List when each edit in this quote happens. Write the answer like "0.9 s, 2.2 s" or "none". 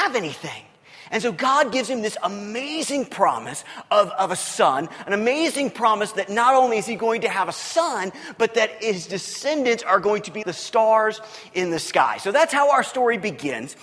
10.4 s